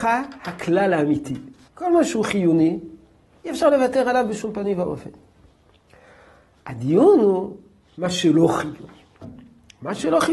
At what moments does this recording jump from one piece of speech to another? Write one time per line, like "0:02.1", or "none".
0:01.7